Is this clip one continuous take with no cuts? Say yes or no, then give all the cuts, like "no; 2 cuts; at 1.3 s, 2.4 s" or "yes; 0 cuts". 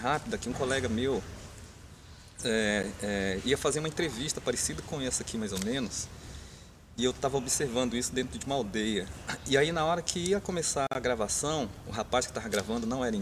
yes; 0 cuts